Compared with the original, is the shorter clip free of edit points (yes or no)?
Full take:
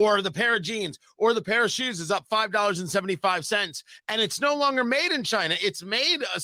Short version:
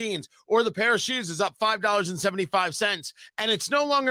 yes